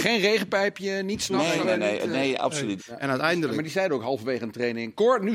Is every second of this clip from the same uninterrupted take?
no; 2 cuts; at 1.6 s, 2.8 s

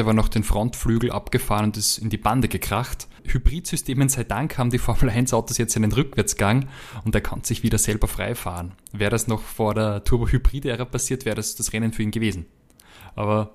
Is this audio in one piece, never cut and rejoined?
yes; 0 cuts

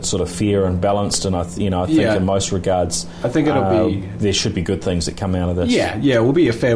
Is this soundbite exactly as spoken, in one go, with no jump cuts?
yes; 0 cuts

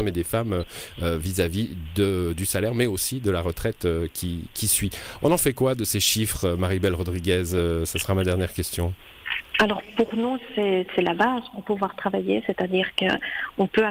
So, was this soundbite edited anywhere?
no; 0 cuts

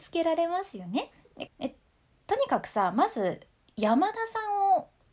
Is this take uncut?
no; 1 cut; at 1.5 s

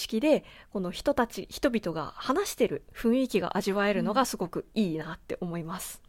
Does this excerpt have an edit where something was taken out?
no; 0 cuts

